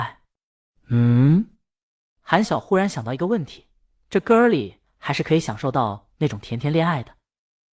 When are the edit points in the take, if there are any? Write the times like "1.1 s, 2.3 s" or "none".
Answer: 2.4 s